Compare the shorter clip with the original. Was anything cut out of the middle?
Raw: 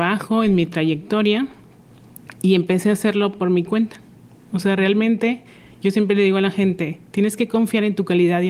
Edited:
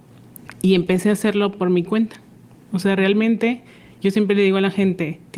no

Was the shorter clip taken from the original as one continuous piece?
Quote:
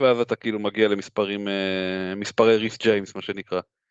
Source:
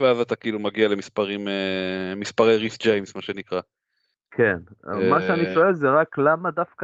yes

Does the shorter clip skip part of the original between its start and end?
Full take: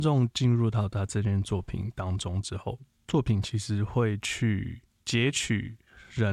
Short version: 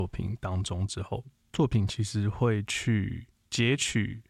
no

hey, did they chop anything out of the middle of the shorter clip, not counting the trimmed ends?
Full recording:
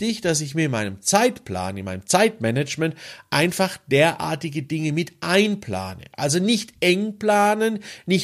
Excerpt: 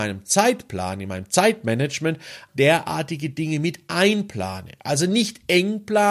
yes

